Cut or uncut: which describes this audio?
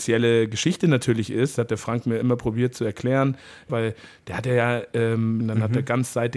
cut